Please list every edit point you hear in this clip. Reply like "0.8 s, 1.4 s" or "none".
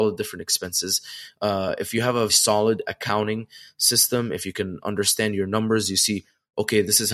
2.3 s